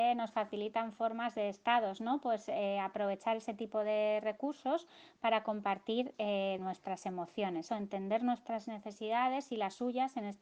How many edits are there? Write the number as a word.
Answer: two